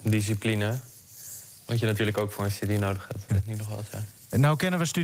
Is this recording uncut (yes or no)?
no